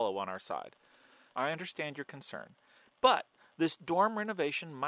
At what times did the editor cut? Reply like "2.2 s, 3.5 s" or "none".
1.3 s, 2.9 s